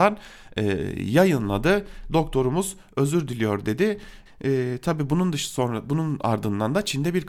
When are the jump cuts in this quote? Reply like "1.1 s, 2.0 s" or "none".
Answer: 4.3 s